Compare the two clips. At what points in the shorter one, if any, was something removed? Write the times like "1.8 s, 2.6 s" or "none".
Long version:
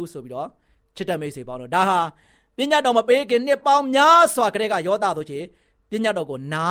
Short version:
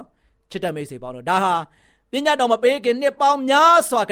none